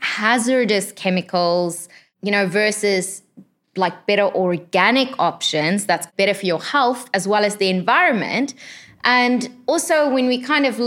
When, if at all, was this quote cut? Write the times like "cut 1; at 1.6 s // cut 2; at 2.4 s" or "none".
none